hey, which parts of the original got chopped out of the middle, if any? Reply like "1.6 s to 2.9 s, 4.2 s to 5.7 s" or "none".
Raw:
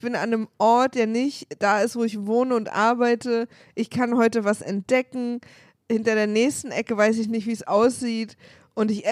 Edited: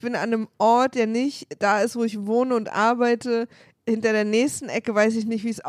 3.7 s to 5.7 s